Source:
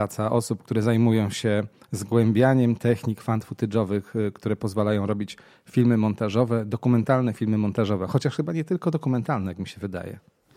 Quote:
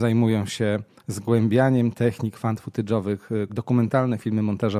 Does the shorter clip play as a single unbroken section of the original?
no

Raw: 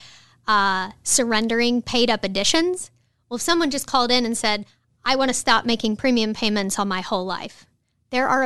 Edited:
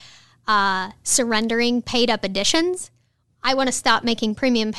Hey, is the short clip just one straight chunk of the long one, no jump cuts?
no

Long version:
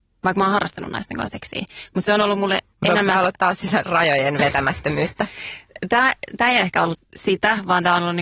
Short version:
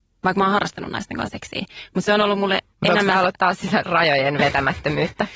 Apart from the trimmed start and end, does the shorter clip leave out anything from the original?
no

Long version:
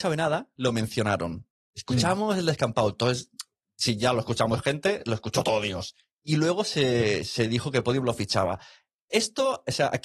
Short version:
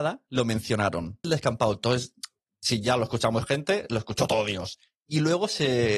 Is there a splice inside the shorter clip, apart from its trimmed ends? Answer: yes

